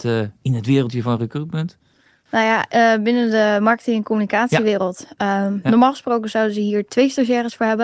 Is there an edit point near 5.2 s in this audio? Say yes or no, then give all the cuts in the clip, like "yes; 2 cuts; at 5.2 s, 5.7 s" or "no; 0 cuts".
no; 1 cut; at 2.3 s